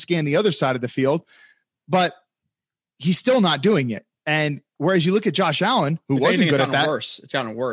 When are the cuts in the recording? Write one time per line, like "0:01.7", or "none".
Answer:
none